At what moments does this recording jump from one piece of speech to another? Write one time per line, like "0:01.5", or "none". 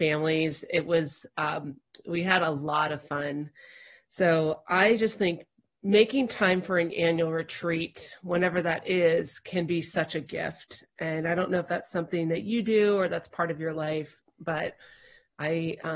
none